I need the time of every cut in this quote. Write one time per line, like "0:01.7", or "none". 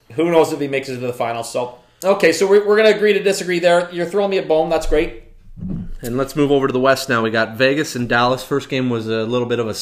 none